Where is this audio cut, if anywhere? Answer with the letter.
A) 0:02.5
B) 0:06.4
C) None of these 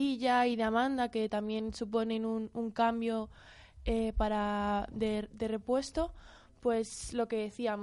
C